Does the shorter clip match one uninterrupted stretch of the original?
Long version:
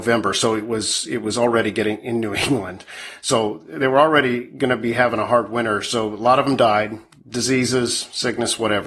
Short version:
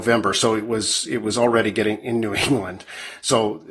yes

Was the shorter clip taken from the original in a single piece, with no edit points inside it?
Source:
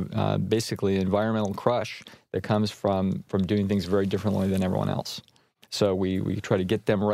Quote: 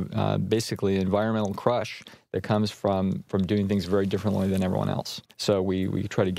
no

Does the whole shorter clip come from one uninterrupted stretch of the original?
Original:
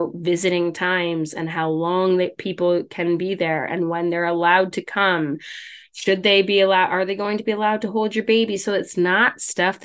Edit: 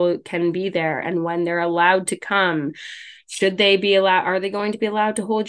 yes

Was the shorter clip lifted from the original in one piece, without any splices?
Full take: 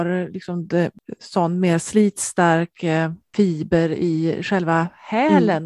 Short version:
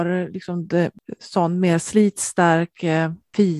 yes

